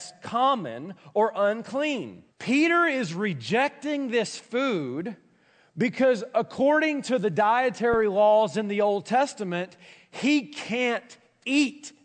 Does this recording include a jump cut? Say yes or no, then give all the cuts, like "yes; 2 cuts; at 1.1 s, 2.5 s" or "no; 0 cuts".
yes; 1 cut; at 2.3 s